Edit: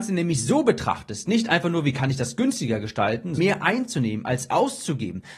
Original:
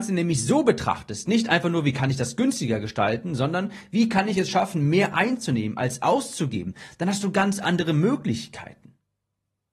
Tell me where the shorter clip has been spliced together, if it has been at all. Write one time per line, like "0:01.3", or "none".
0:03.4

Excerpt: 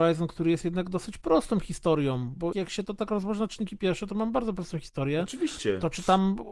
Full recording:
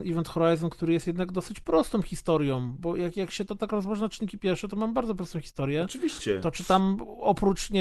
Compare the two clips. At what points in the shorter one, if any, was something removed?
0:02.5

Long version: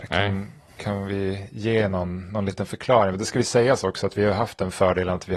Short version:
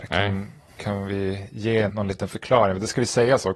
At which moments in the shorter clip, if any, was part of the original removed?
0:01.9

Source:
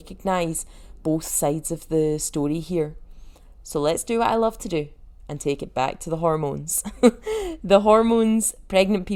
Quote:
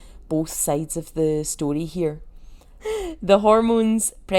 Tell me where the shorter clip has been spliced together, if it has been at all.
0:02.8

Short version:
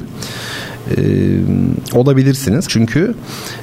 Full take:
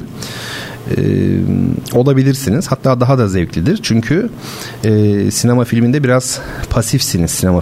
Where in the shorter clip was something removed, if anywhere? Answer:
0:02.7

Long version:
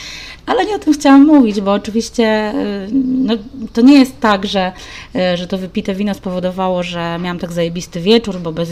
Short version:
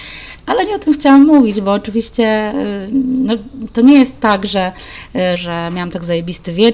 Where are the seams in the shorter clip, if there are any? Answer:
0:05.4

